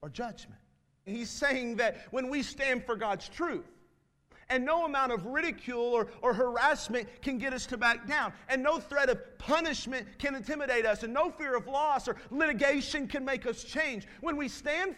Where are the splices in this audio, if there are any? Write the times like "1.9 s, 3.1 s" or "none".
1.1 s